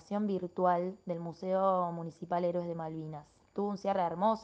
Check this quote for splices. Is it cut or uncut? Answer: uncut